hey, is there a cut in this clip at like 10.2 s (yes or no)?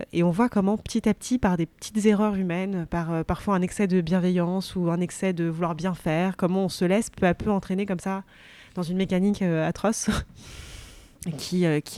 no